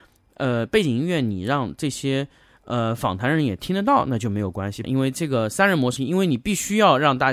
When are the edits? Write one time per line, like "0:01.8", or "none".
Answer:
0:04.8
0:06.0